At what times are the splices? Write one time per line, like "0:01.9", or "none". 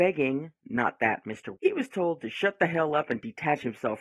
0:01.6